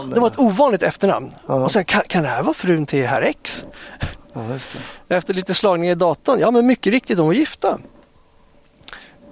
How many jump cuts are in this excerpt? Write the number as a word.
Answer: zero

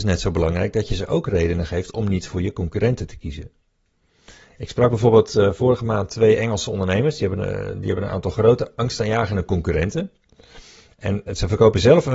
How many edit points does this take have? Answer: one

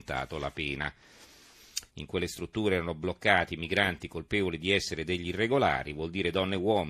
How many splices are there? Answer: one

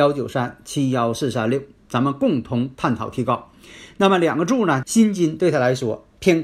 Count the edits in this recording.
one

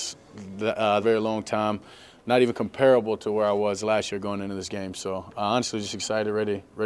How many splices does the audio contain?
one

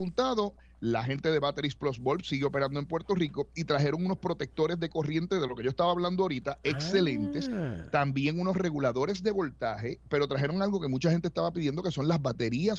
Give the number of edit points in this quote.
zero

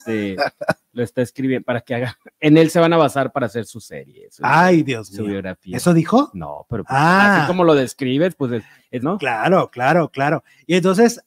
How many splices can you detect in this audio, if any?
one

